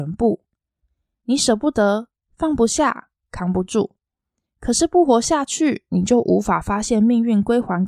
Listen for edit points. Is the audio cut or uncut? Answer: uncut